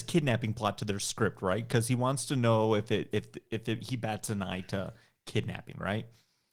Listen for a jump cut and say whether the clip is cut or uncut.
uncut